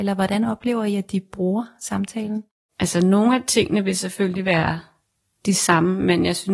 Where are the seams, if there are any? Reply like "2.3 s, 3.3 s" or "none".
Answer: none